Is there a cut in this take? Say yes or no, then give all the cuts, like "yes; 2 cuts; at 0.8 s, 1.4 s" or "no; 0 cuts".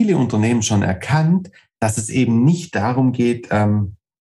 no; 0 cuts